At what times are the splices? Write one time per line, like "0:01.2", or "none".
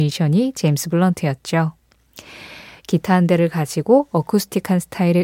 0:02.8